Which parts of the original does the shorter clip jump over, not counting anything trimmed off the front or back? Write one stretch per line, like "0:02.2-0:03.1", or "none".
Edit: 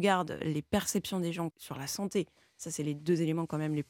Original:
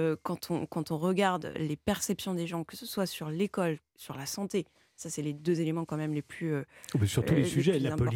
0:02.6-0:03.9